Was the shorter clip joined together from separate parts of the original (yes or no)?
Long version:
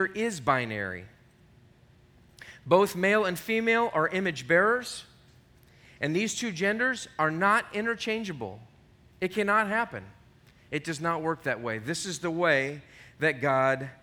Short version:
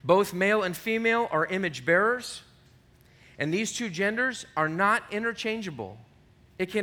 no